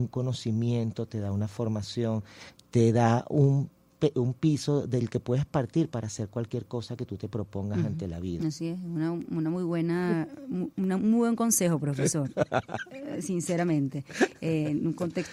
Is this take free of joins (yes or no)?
no